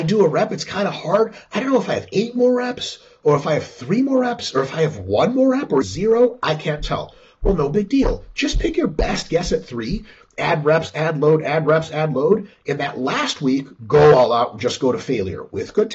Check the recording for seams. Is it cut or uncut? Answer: cut